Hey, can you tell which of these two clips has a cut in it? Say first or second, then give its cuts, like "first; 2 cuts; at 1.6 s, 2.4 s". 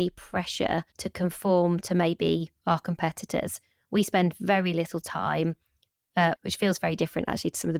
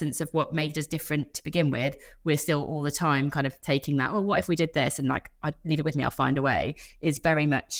first; 2 cuts; at 0.9 s, 6.3 s